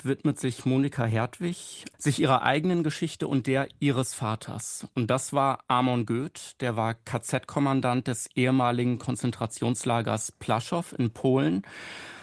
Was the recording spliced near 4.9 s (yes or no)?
no